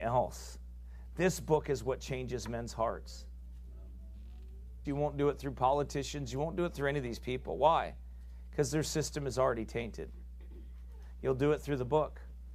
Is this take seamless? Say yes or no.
no